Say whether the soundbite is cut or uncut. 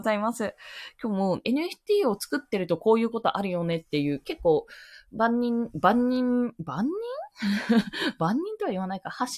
cut